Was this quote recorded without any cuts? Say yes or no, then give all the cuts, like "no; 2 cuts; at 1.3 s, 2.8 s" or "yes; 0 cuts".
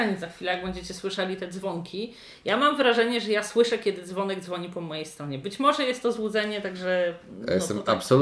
yes; 0 cuts